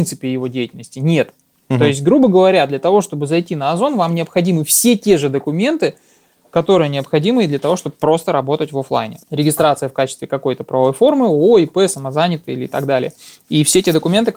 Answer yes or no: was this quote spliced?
no